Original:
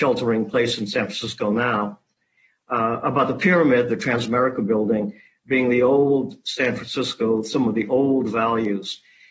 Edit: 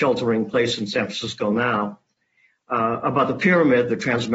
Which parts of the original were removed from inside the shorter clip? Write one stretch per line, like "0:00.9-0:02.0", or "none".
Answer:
none